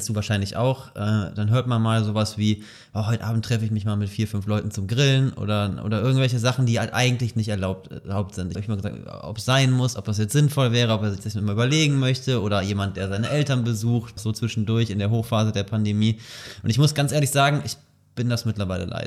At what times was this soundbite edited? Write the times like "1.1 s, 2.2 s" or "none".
8.6 s, 14.2 s